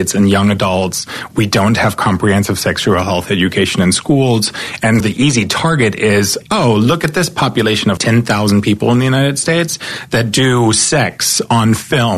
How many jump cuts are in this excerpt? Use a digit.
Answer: 2